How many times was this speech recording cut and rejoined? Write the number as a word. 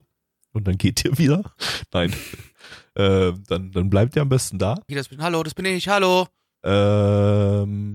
two